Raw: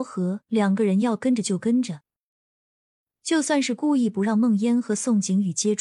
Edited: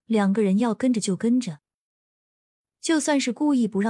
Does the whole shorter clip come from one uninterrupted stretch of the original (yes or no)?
yes